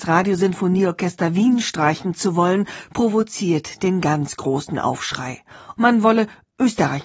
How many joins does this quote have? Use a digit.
1